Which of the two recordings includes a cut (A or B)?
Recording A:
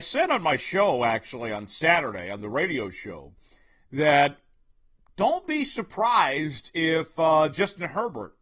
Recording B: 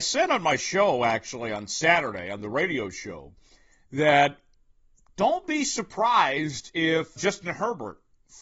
B